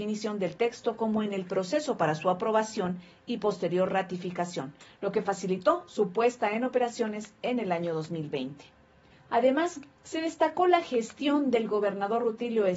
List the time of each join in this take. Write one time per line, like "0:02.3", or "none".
0:09.1